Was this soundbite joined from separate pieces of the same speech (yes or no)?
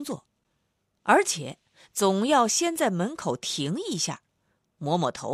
no